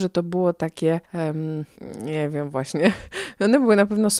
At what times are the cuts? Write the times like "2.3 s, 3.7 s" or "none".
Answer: 1.0 s

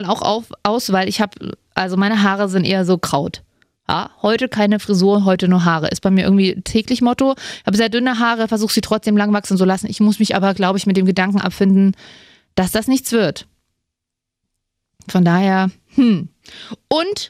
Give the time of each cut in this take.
none

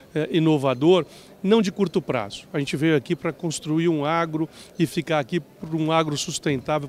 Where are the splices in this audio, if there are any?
none

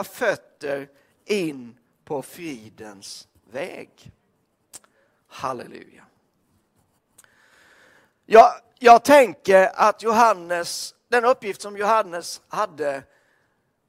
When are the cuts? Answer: none

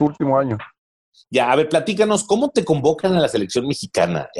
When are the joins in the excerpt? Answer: none

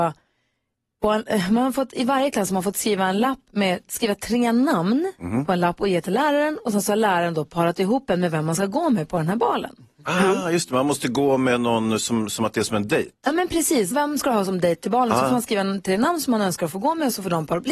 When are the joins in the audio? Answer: 13.9 s

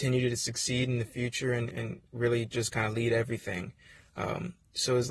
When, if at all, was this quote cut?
1.7 s

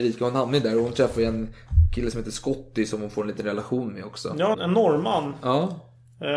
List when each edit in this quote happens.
4.5 s

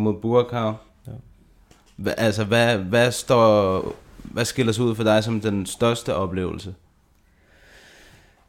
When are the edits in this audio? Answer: none

